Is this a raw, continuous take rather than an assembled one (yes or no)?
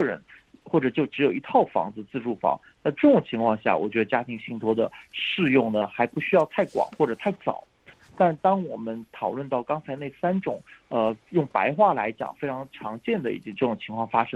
yes